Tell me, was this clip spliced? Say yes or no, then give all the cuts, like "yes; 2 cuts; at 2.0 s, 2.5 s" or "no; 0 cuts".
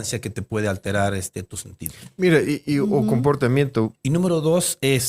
yes; 1 cut; at 3.9 s